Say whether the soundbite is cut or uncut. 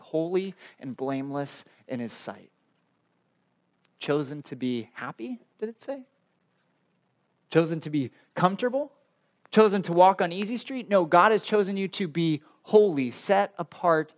uncut